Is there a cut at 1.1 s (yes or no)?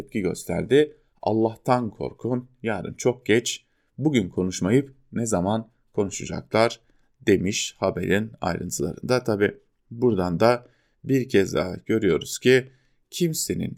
yes